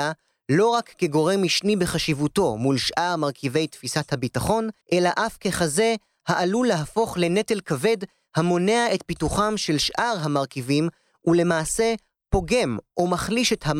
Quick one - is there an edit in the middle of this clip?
yes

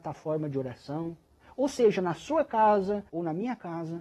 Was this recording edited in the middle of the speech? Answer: yes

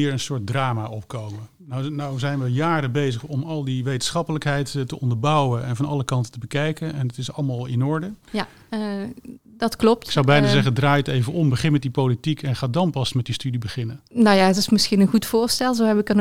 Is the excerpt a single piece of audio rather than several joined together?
no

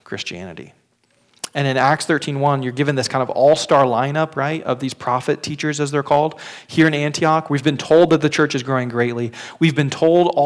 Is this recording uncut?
yes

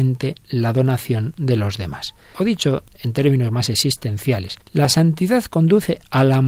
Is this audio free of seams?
no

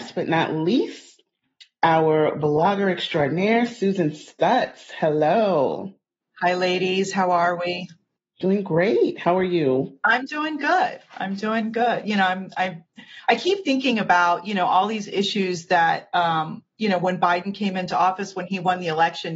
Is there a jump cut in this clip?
no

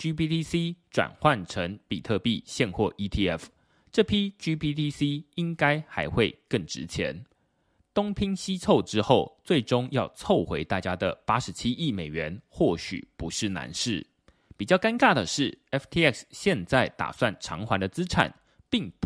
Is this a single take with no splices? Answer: yes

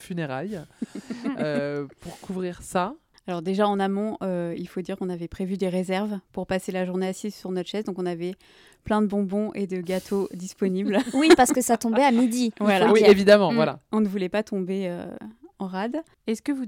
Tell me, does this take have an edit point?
no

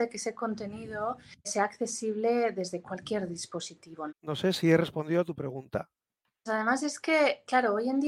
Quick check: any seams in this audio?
yes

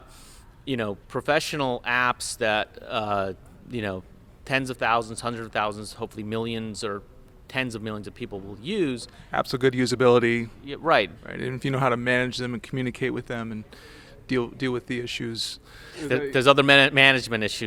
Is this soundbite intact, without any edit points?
no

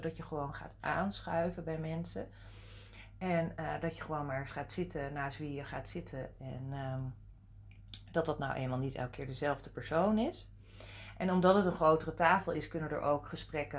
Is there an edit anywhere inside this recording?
no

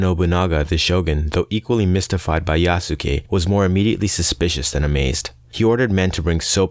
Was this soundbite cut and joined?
no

